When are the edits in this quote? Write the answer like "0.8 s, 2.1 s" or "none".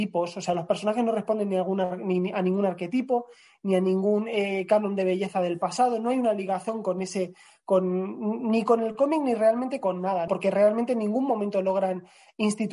10.3 s

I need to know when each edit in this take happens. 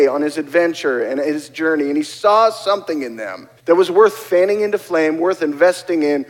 3.6 s

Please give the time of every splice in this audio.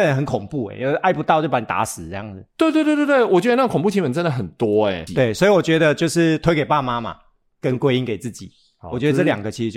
5.1 s

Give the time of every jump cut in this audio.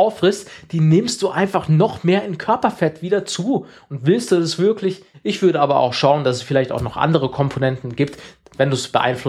5.1 s

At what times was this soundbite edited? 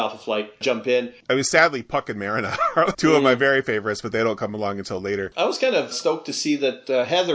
2.9 s, 5.9 s

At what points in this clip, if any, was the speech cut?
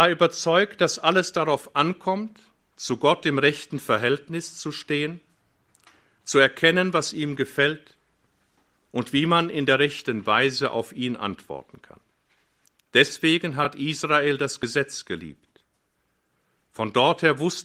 none

